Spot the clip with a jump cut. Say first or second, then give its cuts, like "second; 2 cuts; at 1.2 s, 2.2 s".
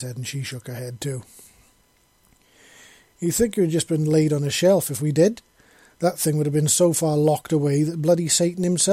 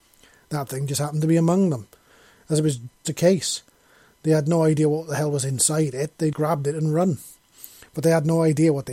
second; 3 cuts; at 3.0 s, 6.3 s, 7.9 s